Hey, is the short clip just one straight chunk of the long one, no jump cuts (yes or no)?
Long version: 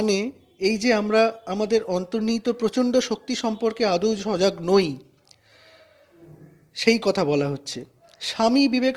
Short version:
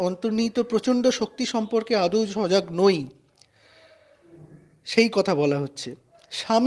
yes